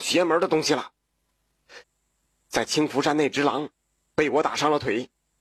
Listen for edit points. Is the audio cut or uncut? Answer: cut